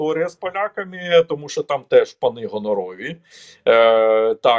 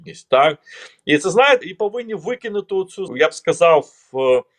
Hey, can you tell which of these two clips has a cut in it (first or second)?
second